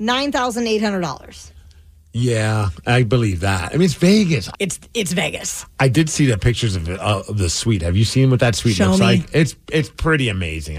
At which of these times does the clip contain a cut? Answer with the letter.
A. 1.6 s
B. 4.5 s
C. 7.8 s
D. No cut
B